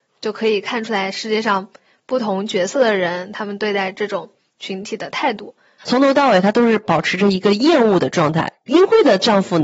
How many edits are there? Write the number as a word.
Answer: two